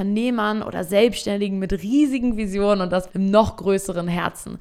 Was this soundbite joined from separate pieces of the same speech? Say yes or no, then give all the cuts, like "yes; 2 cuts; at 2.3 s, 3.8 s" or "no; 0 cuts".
yes; 1 cut; at 3.1 s